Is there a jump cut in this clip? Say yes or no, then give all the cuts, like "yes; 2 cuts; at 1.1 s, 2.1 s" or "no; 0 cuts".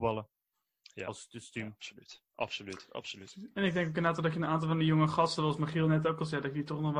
no; 0 cuts